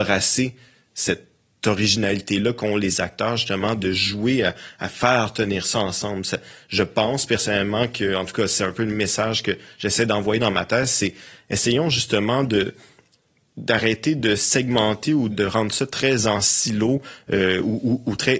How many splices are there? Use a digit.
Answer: 1